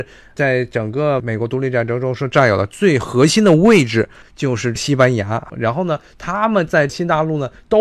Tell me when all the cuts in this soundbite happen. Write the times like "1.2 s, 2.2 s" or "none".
4.2 s, 5.5 s